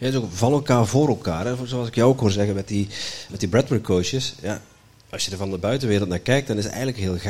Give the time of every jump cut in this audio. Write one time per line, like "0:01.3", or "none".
0:03.3